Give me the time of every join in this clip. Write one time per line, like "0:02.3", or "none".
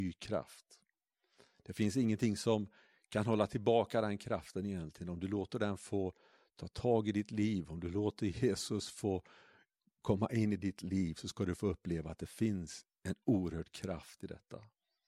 none